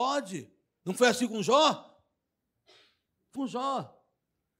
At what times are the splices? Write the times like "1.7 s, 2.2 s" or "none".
3.4 s